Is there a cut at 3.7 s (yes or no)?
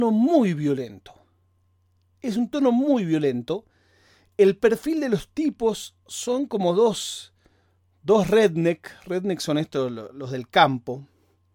no